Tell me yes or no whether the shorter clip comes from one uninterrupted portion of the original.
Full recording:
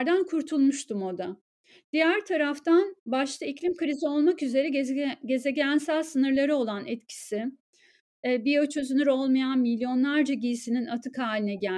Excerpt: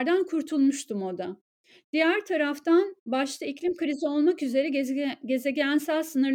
yes